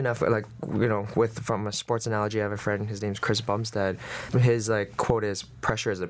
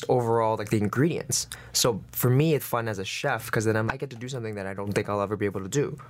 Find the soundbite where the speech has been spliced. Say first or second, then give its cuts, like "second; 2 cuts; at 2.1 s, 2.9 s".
second; 2 cuts; at 2.6 s, 3.9 s